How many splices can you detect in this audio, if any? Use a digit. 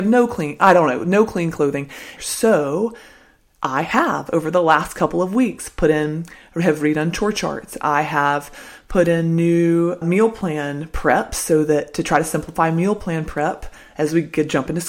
2